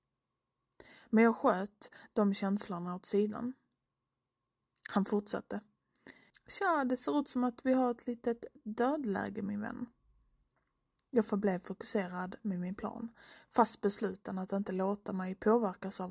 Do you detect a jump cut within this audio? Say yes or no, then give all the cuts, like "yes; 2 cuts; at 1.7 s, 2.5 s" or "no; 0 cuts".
yes; 1 cut; at 6.3 s